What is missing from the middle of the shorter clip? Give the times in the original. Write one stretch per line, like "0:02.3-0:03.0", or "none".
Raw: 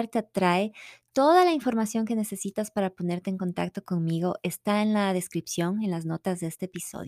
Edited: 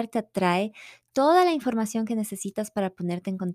none